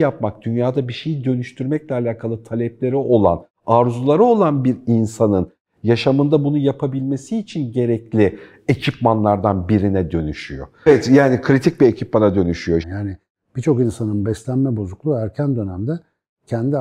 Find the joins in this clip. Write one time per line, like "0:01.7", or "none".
0:10.9
0:12.8